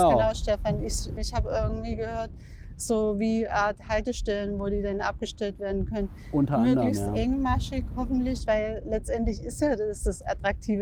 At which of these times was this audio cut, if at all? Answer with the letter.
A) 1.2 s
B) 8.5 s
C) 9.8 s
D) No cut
A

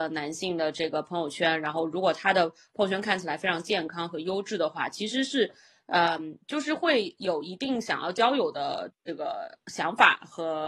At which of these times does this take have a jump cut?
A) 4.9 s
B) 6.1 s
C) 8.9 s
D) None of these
C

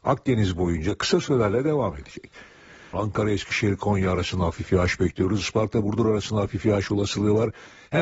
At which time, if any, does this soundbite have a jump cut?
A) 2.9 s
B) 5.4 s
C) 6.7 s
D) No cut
A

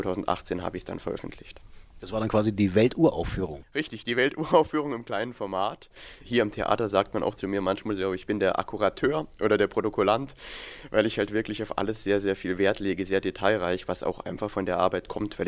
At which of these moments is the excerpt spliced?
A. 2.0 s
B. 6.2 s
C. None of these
B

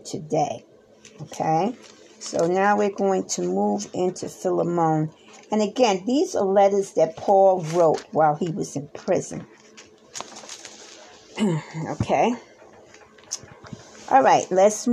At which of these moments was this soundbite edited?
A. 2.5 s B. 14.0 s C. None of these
C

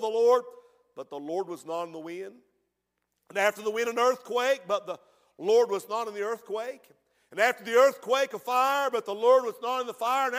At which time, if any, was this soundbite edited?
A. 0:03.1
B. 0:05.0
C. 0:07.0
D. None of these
D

